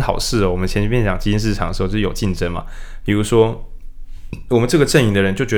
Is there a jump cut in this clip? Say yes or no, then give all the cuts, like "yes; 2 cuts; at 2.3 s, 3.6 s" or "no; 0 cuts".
no; 0 cuts